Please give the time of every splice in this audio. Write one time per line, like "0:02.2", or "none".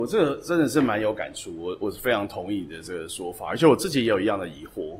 none